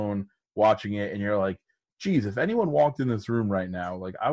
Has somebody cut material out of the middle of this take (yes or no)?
no